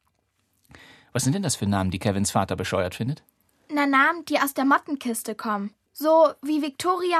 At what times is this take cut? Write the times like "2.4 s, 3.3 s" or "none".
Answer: 5.9 s